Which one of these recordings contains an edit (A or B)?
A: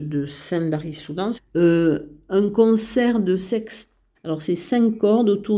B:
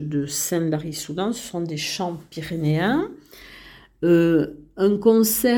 A